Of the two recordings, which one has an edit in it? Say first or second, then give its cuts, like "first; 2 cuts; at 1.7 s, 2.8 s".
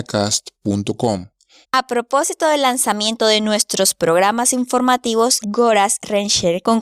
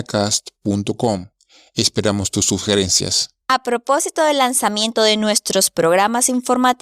first; 2 cuts; at 1.6 s, 5.4 s